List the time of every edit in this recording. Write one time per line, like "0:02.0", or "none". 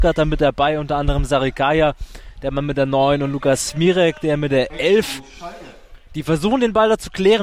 none